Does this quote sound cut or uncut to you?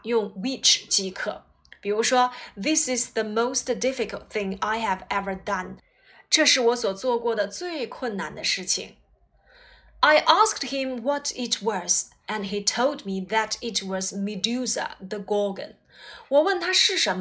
uncut